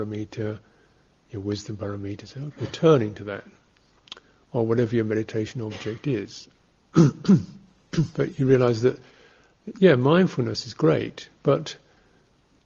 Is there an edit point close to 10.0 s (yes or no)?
no